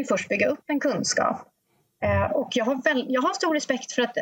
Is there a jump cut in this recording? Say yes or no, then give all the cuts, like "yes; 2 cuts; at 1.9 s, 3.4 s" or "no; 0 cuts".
yes; 1 cut; at 2.3 s